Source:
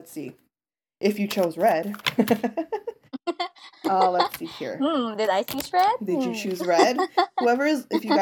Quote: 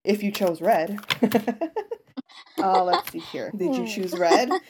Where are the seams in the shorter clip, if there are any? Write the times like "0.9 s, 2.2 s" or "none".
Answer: 2.3 s, 3.5 s